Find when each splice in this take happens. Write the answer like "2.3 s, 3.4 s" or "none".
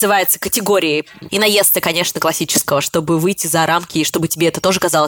1.3 s, 2.8 s